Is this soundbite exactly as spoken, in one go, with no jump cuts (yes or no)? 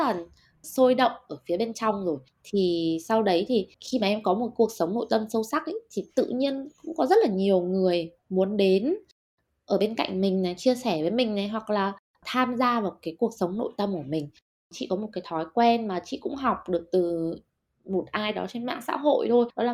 no